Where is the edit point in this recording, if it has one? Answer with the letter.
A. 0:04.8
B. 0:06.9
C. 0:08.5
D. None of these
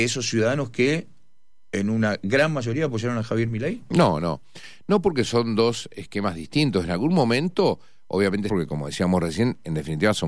C